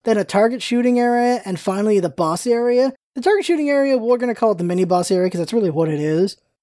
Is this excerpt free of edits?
yes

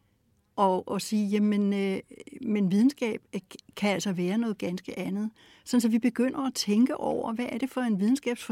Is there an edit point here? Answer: no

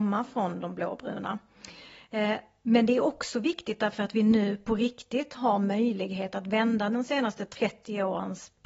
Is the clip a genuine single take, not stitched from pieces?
yes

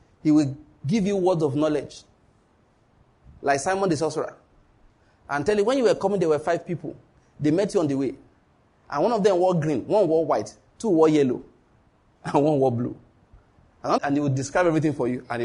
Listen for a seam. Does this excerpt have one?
yes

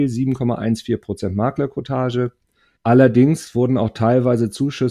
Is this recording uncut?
no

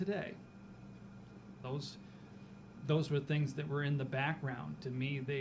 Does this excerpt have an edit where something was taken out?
yes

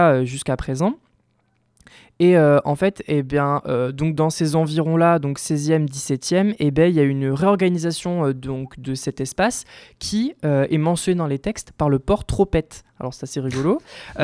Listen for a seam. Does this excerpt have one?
no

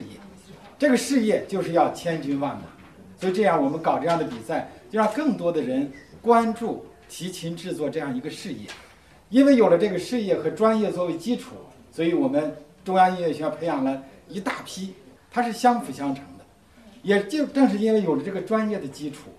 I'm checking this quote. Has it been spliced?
yes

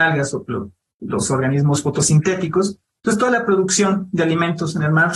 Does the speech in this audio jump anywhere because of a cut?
no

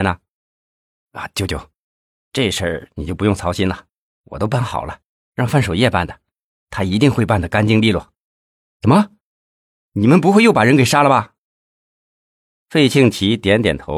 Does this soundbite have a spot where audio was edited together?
no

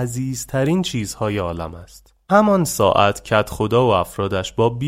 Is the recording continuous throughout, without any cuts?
yes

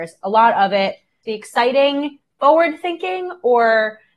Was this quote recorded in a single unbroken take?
no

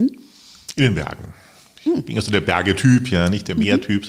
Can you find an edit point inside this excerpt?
no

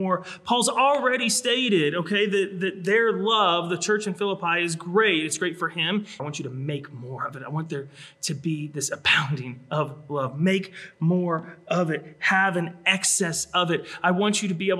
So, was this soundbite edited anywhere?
yes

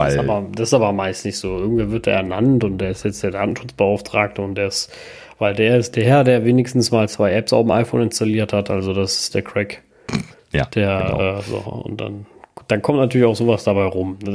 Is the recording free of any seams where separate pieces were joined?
yes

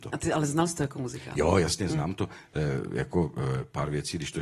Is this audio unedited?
yes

